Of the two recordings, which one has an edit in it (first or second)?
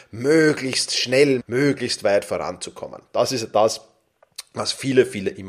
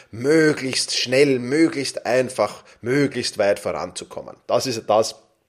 first